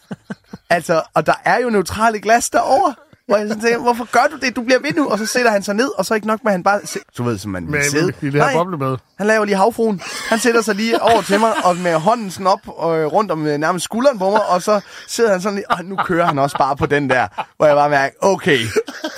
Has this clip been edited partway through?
yes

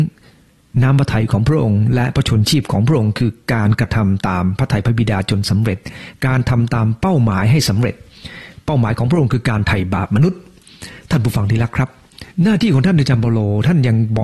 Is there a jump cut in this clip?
yes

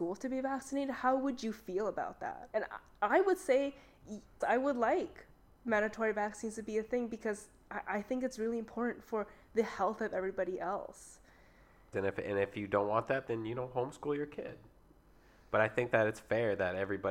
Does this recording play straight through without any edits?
no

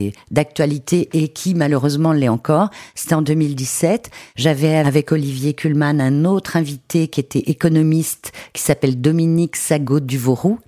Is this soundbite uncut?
yes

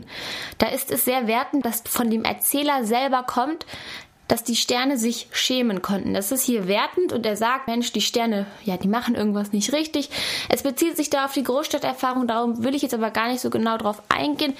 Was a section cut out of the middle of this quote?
yes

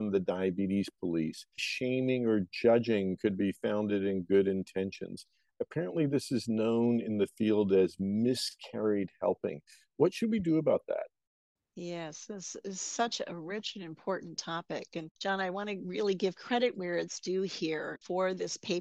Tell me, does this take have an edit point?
yes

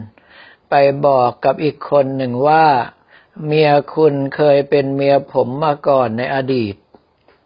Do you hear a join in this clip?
no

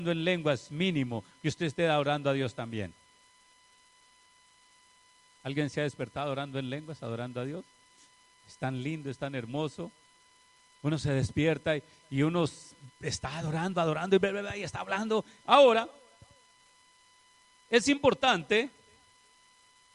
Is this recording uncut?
no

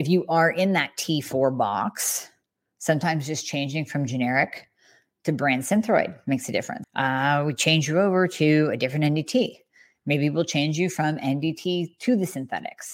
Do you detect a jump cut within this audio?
yes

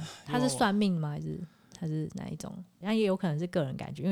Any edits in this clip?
yes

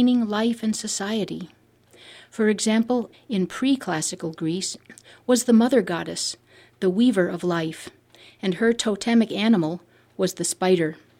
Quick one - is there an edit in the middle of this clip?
yes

